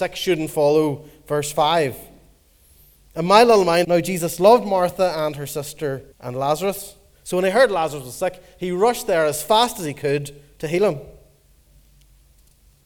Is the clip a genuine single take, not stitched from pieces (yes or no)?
no